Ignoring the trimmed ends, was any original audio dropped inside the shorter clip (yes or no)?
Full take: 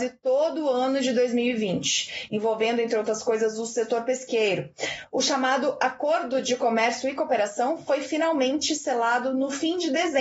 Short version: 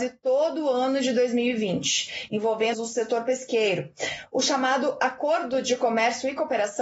yes